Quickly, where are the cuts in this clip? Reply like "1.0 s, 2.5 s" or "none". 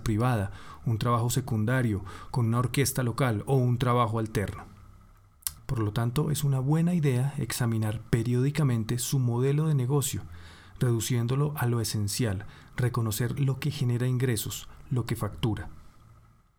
5.6 s